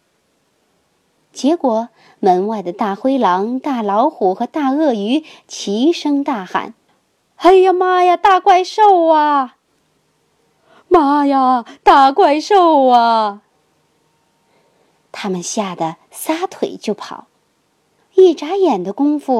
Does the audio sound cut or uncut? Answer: uncut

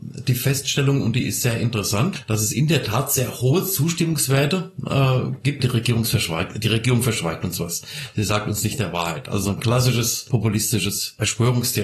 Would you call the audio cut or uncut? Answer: cut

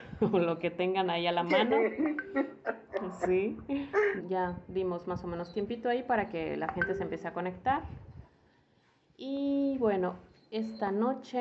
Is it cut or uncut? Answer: cut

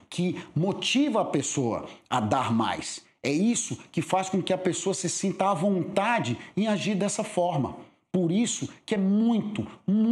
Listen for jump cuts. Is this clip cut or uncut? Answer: uncut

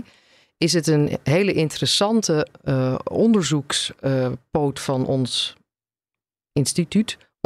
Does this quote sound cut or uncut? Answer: uncut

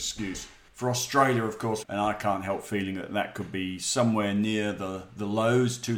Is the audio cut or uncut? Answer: cut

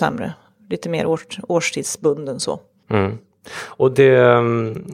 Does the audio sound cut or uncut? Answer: cut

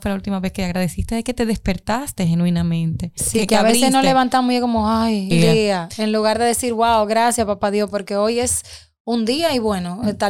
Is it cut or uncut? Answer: cut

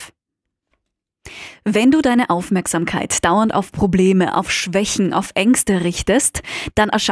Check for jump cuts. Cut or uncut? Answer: uncut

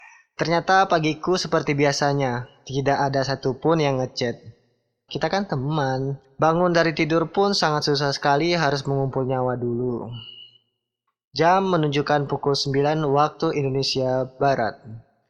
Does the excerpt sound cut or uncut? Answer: cut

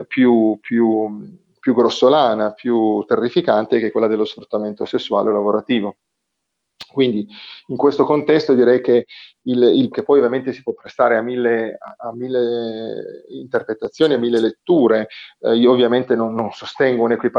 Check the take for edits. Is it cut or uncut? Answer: cut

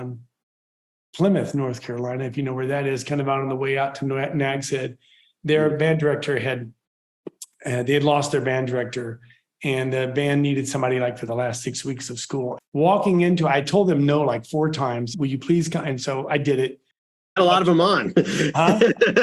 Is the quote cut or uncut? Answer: cut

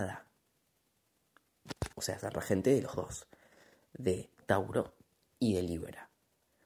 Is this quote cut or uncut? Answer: cut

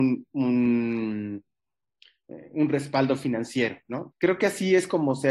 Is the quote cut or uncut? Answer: cut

